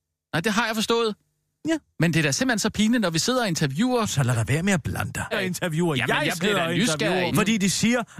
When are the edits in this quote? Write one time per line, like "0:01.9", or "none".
0:05.3
0:07.3